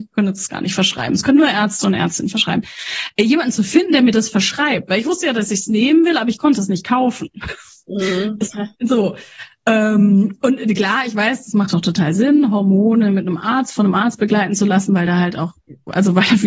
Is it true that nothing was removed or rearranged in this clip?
yes; 0 cuts

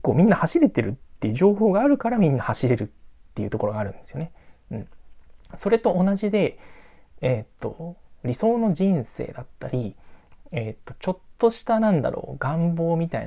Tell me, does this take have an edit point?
no; 0 cuts

